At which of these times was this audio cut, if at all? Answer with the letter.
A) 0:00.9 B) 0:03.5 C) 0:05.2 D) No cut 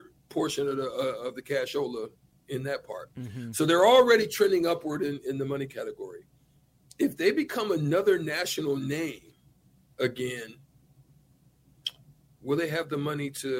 C